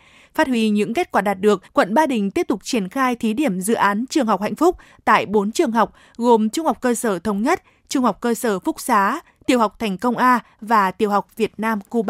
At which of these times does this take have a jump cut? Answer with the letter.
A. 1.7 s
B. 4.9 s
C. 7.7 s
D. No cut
A